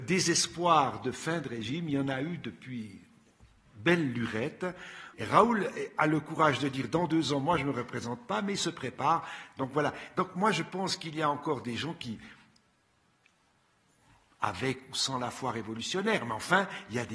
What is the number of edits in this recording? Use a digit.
1